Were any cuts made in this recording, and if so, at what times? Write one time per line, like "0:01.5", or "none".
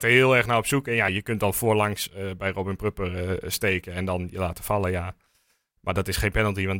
none